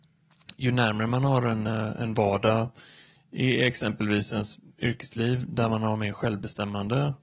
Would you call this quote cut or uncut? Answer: uncut